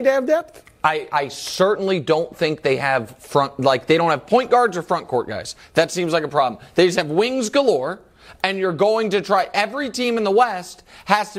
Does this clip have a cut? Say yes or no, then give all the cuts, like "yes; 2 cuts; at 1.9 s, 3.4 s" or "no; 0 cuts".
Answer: no; 0 cuts